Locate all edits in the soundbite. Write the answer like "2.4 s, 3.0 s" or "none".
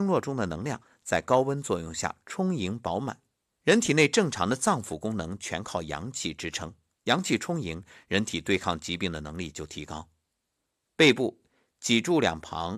3.5 s